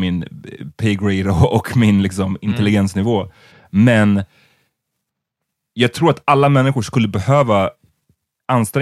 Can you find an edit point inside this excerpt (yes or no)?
no